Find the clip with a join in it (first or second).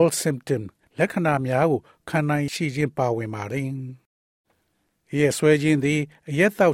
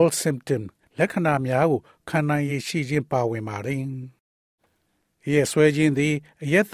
first